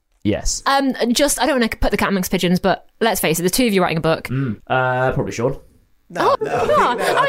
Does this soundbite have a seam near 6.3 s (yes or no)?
yes